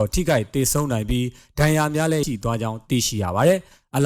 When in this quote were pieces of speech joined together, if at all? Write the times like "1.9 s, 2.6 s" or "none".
2.2 s